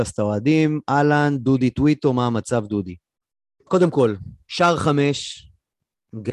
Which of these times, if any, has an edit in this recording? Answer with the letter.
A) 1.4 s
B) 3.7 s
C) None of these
B